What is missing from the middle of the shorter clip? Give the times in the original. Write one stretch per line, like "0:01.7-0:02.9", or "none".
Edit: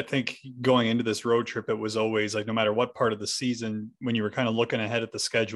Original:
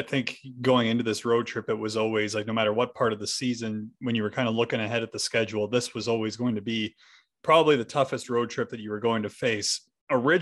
none